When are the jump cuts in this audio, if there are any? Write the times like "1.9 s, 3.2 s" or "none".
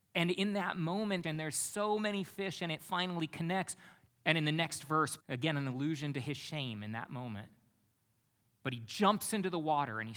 1.2 s, 4.1 s, 5.2 s